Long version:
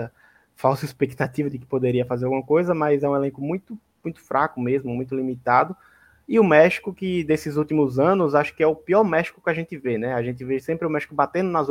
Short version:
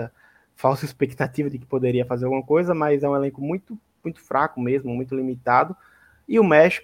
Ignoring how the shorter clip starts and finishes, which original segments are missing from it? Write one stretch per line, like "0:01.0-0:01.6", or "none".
none